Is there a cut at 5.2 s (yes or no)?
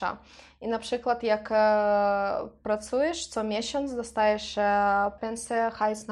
yes